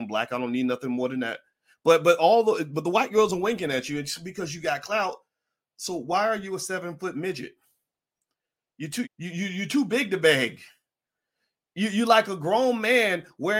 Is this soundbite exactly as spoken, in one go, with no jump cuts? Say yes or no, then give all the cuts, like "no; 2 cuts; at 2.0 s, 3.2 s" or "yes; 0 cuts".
no; 1 cut; at 9.0 s